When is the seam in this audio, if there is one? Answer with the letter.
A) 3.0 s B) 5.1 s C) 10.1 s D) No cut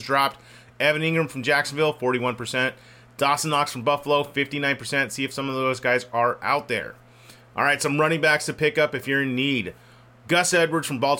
D